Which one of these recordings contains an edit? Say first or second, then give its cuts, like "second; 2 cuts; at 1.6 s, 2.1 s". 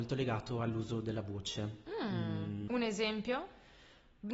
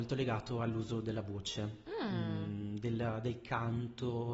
first; 1 cut; at 2.7 s